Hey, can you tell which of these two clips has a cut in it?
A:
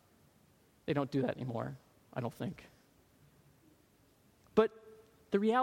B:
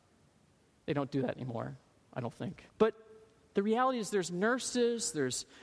B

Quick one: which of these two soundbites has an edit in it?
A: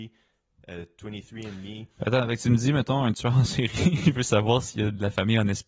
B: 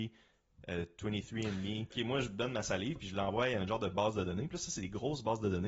B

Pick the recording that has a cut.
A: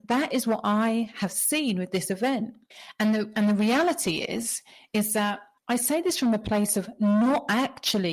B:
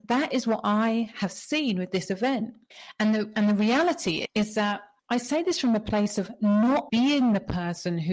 B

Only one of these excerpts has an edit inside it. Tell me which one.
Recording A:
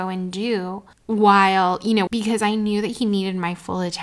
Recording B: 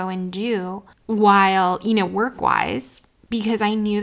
A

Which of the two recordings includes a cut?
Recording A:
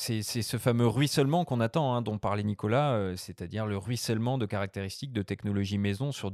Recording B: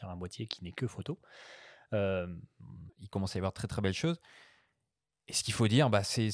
B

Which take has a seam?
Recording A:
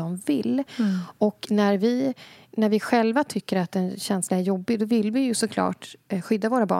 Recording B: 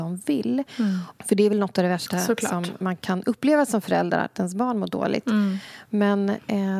B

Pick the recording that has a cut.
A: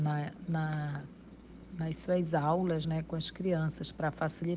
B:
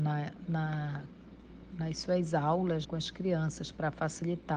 B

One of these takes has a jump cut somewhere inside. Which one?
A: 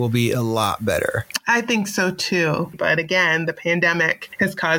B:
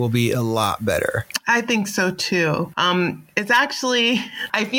A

